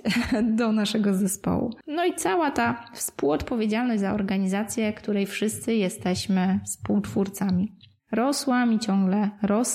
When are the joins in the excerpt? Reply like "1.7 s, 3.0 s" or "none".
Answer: 1.8 s